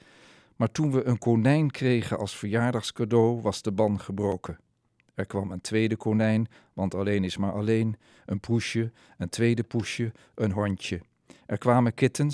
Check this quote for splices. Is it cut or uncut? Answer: uncut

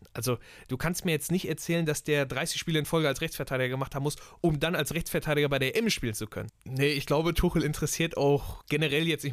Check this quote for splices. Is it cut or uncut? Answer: cut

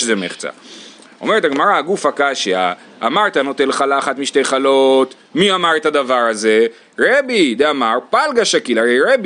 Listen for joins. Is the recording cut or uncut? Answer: uncut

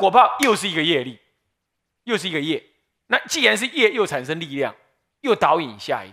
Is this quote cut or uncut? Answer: uncut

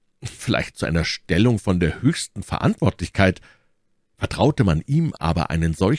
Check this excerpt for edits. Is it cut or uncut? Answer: uncut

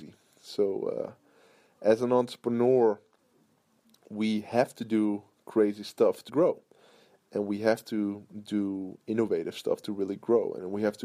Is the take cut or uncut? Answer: cut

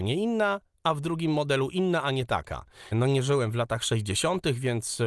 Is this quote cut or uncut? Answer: cut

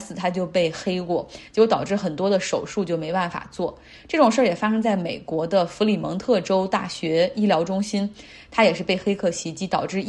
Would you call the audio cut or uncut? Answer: uncut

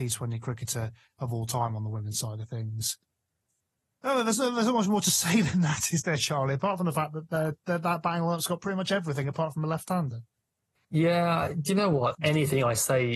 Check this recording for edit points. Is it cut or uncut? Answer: cut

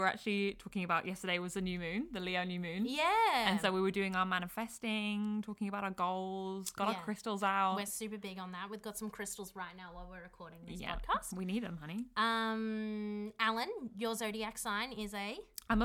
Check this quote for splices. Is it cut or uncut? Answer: uncut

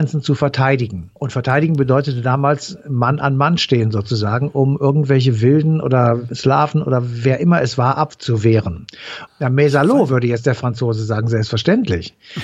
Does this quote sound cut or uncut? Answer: cut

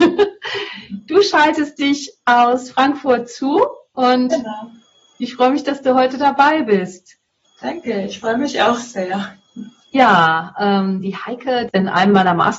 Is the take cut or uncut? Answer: cut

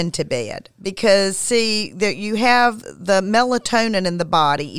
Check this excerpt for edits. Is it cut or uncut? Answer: uncut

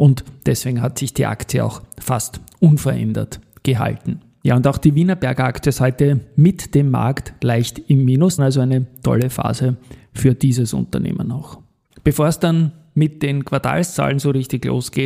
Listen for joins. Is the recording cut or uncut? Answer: cut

